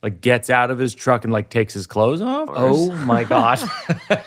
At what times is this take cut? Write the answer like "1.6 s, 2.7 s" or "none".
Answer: 2.5 s